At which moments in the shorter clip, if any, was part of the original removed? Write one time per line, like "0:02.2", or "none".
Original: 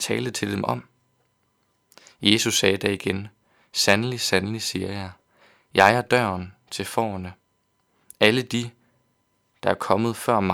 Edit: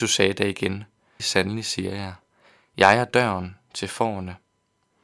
0:01.2